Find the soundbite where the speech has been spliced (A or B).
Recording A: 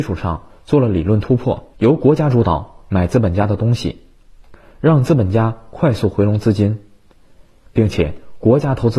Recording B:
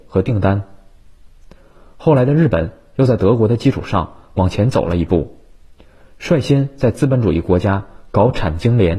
A